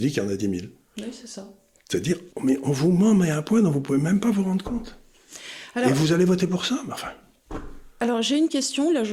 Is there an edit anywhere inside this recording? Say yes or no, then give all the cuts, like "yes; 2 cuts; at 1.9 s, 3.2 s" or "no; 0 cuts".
yes; 1 cut; at 2.3 s